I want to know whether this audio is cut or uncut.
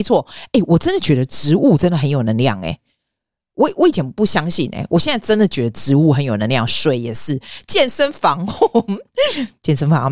uncut